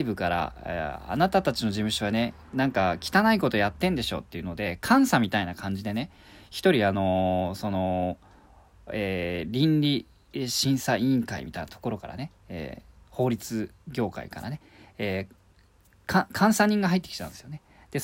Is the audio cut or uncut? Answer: uncut